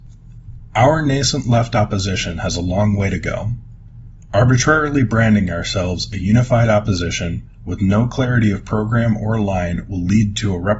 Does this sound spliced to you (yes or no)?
no